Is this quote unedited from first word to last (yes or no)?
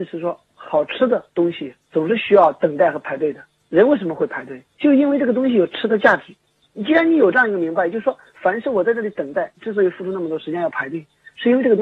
yes